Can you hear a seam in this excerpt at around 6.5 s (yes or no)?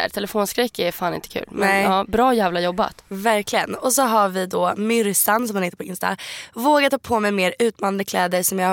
no